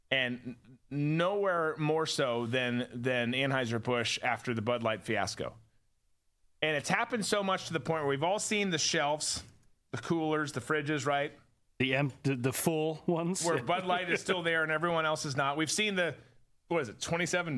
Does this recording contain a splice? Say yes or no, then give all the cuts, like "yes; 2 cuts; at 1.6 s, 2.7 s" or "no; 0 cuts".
no; 0 cuts